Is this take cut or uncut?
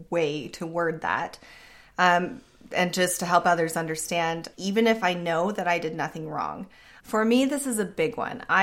cut